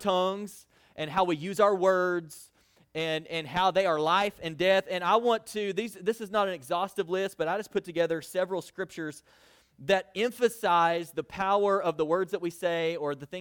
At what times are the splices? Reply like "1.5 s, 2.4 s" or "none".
none